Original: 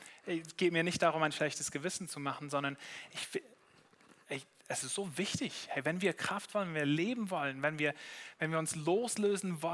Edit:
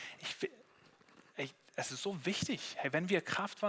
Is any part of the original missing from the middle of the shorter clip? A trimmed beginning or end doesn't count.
no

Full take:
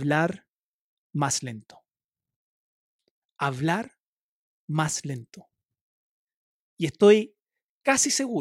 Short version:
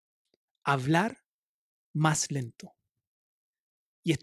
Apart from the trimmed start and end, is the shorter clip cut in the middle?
no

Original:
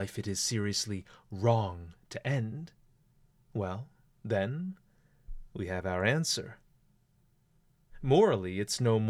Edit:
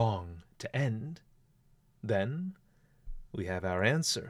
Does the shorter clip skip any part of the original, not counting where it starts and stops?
yes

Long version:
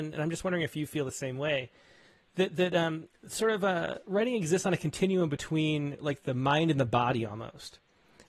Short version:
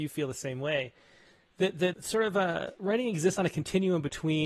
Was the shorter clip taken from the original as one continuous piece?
no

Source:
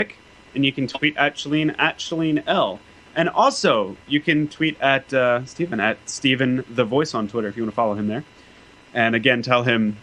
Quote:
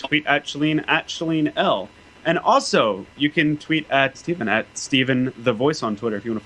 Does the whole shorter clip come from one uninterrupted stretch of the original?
no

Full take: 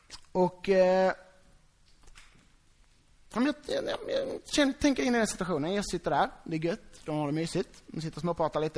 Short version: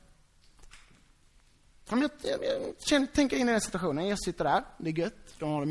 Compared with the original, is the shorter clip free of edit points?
no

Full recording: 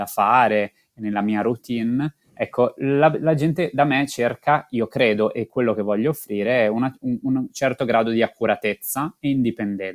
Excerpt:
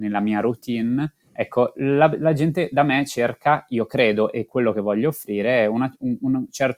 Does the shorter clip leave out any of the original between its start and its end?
no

